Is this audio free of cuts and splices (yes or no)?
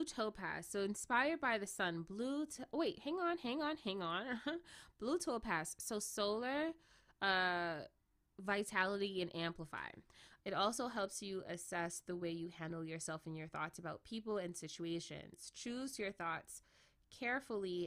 no